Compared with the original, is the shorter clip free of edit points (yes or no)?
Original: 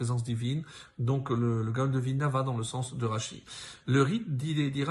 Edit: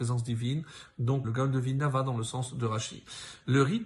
no